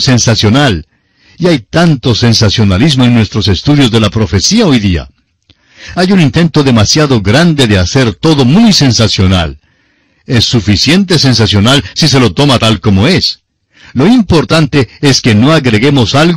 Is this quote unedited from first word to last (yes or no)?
yes